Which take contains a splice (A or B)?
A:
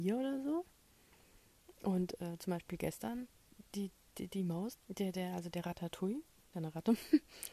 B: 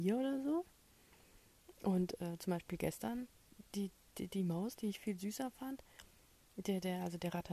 A